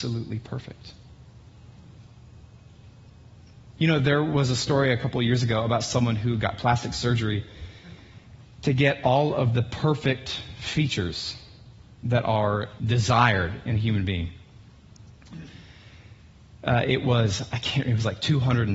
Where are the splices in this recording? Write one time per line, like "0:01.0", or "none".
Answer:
0:03.8
0:12.8